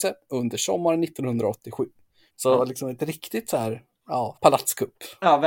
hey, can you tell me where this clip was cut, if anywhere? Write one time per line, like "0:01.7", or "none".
0:02.3
0:04.3